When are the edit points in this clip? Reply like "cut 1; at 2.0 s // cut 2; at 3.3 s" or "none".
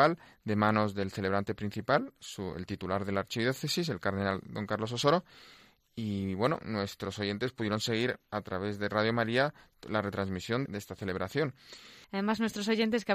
cut 1; at 12.0 s